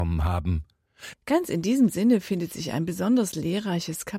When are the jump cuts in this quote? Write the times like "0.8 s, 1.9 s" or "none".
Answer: 1.1 s